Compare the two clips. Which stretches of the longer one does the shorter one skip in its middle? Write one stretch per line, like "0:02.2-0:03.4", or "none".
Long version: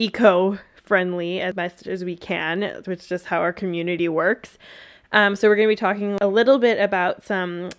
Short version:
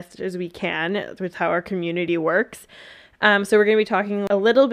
0:03.0-0:03.2